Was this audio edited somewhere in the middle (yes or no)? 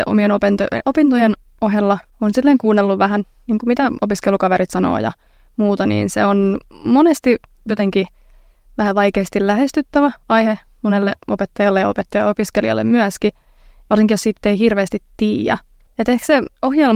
yes